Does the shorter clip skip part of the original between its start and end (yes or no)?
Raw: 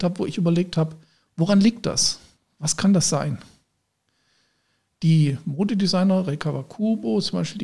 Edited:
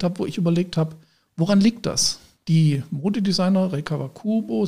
yes